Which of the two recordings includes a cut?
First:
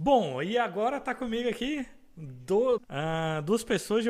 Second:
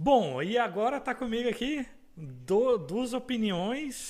first; 1 cut; at 2.8 s

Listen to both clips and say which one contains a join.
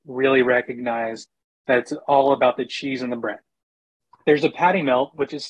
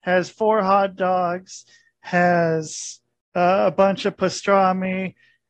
first; 1 cut; at 4.2 s

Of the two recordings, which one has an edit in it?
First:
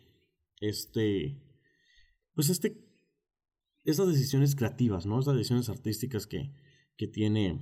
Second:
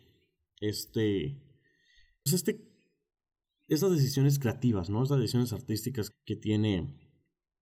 second; 2 cuts; at 2.3 s, 6.1 s

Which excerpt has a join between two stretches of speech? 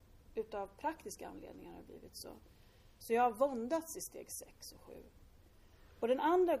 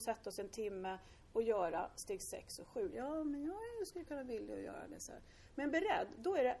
second; 1 cut; at 2.9 s

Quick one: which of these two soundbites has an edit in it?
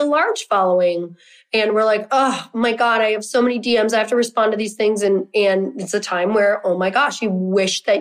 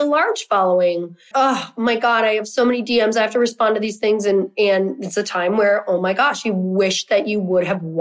second; 1 cut; at 1.3 s

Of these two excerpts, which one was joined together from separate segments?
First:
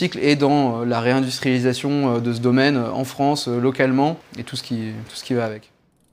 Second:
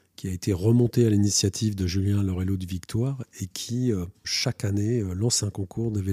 second; 1 cut; at 4.2 s

